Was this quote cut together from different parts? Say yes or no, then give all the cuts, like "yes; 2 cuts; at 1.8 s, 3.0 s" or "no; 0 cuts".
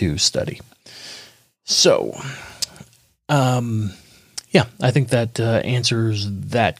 no; 0 cuts